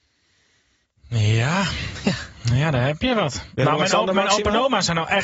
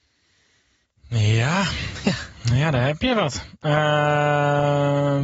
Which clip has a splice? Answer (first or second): first